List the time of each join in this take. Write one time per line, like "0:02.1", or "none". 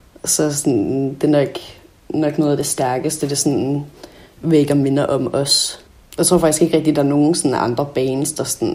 none